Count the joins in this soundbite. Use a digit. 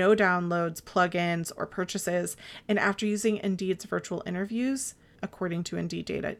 1